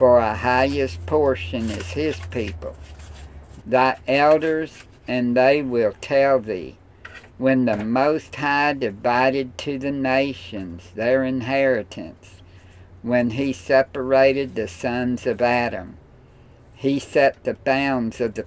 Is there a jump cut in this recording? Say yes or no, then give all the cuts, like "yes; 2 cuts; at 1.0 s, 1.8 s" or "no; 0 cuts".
yes; 1 cut; at 3.6 s